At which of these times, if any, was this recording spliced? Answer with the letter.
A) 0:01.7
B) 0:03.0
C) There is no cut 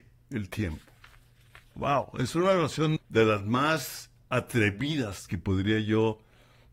B